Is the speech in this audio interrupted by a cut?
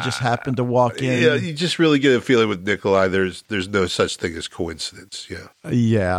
no; 0 cuts

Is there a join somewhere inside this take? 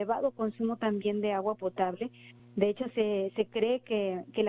no; 0 cuts

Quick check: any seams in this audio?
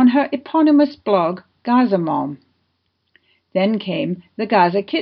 no; 0 cuts

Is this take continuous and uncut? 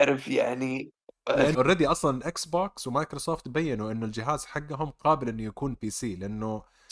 no; 1 cut; at 1.5 s

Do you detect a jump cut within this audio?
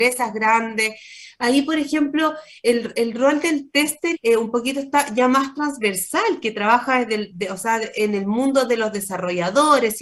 yes; 2 cuts; at 2.9 s, 4.1 s

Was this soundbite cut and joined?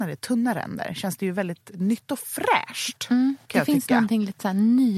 yes; 1 cut; at 1.7 s

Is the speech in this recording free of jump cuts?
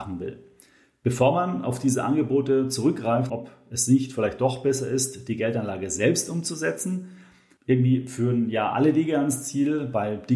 no; 1 cut; at 3.3 s

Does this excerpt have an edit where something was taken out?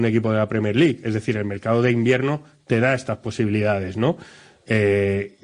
no; 0 cuts

